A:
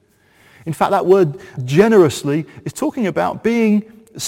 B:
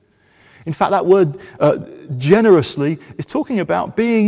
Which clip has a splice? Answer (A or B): A